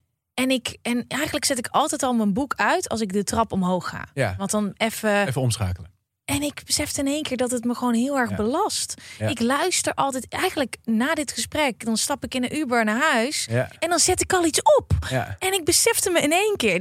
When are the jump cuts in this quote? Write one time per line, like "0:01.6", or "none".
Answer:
none